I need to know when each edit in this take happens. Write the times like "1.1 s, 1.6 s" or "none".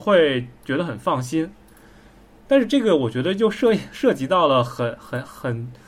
none